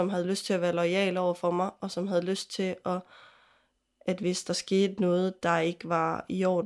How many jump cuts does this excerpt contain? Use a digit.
0